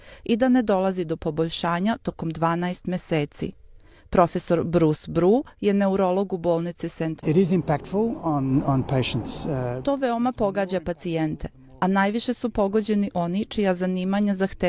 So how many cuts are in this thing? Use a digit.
1